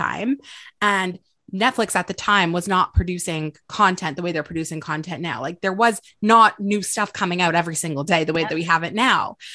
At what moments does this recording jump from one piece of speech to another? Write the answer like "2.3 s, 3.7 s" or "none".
none